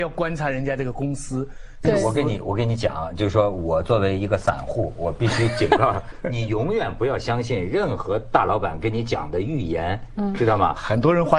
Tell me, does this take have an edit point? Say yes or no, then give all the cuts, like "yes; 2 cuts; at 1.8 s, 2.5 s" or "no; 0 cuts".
yes; 2 cuts; at 1.8 s, 6.1 s